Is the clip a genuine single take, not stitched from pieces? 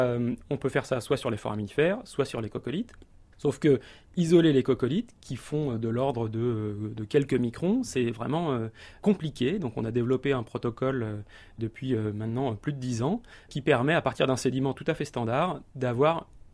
yes; 0 cuts

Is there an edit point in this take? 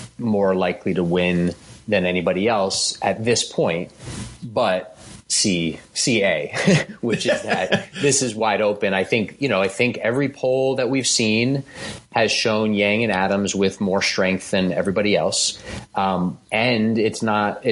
yes; 1 cut; at 16.4 s

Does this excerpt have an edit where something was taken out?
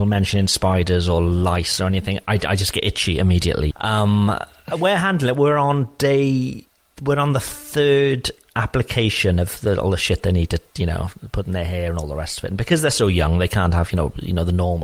yes; 1 cut; at 3.7 s

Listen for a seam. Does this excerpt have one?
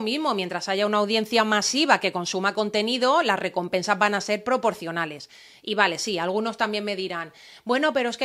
no; 0 cuts

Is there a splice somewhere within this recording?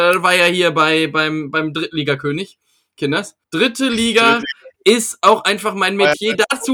yes; 1 cut; at 3.4 s

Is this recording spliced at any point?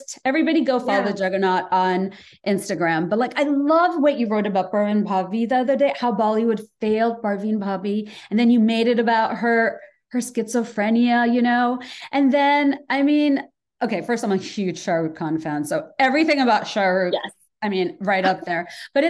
no; 0 cuts

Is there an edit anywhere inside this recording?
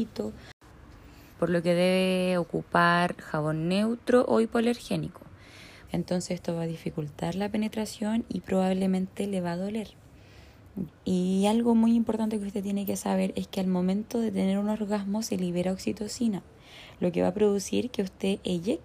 yes; 3 cuts; at 1.3 s, 5.9 s, 10.9 s

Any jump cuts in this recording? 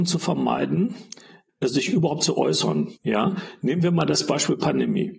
yes; 2 cuts; at 1.5 s, 3.0 s

